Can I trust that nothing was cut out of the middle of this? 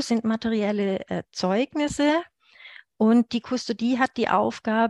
yes; 0 cuts

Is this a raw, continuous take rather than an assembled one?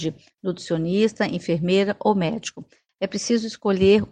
yes; 0 cuts

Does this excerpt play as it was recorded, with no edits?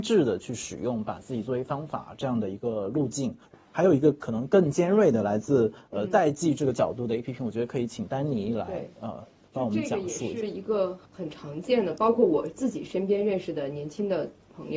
yes; 0 cuts

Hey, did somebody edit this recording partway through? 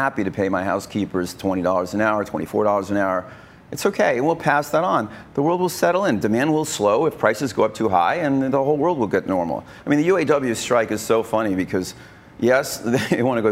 no; 0 cuts

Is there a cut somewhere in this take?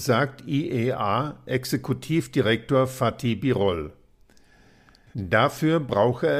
yes; 1 cut; at 5.1 s

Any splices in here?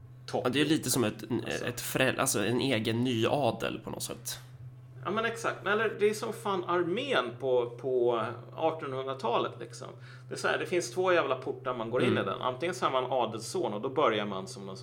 no; 0 cuts

